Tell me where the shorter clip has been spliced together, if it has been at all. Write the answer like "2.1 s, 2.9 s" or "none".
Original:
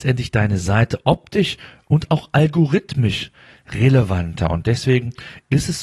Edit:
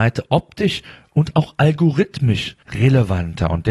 2.6 s